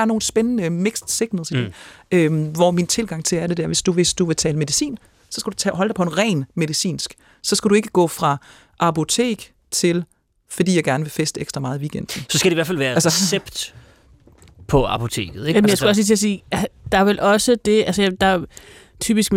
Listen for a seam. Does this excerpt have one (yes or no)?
no